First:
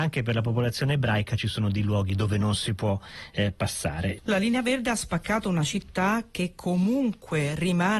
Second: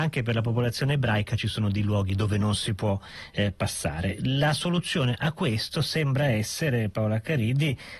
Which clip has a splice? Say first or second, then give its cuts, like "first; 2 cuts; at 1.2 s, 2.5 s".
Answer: first; 1 cut; at 4.2 s